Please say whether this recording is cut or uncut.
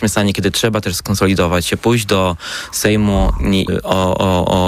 cut